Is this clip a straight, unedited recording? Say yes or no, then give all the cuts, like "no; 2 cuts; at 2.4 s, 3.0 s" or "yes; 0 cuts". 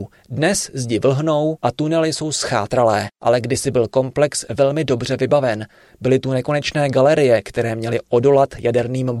yes; 0 cuts